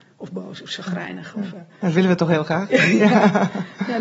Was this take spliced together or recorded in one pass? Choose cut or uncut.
cut